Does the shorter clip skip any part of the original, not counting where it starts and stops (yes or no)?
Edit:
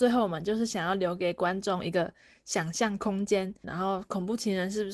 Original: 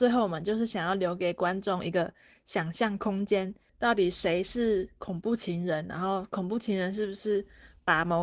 yes